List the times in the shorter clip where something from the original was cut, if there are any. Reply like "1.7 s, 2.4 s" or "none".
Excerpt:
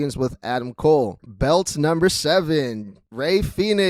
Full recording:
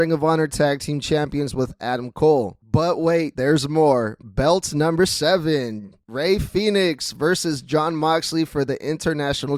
1.2 s